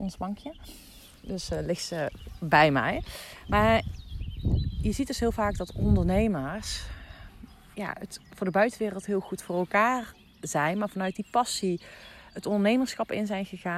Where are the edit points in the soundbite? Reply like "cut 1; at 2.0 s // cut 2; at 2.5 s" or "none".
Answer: none